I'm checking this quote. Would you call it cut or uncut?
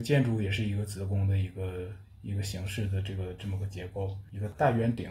uncut